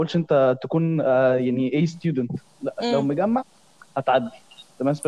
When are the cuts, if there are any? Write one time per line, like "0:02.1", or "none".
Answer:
none